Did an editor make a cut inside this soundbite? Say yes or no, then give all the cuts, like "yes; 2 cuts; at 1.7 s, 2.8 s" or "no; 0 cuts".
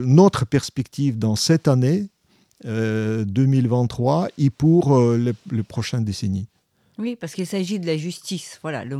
no; 0 cuts